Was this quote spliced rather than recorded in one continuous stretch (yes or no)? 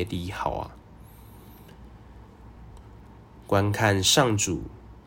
yes